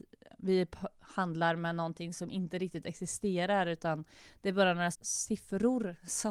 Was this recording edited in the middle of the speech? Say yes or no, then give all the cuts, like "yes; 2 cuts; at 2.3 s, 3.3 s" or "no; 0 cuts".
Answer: yes; 1 cut; at 4.9 s